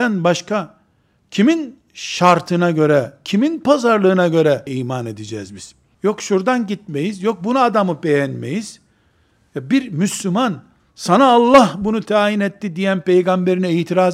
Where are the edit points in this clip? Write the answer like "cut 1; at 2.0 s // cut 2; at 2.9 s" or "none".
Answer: cut 1; at 5.9 s